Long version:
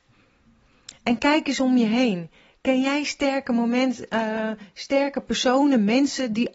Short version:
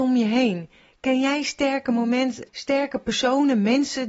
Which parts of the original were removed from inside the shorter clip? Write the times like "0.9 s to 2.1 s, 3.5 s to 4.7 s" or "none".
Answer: 4.1 s to 4.7 s